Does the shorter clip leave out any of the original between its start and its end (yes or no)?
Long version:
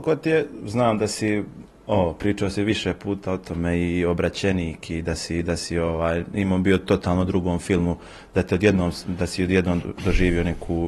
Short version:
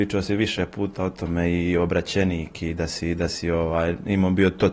no